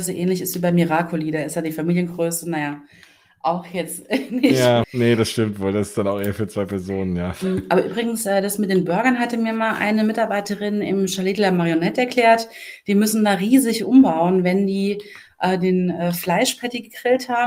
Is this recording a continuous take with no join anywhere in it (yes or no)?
no